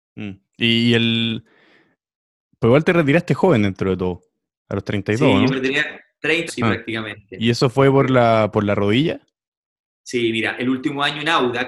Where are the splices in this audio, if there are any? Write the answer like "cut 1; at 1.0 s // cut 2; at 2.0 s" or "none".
cut 1; at 6.5 s

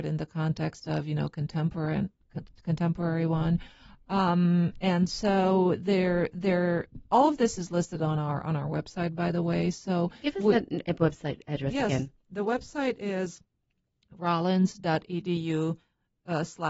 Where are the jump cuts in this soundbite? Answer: none

